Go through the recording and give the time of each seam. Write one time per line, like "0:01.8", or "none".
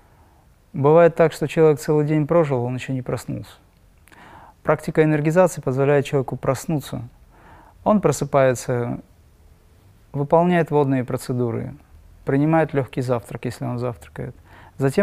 none